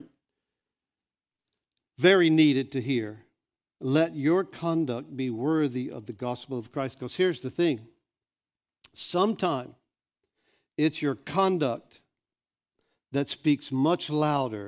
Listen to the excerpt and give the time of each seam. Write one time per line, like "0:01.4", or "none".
none